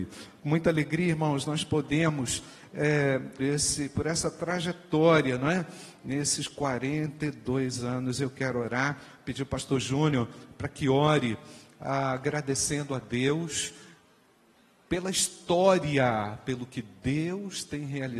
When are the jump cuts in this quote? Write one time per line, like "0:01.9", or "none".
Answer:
0:03.4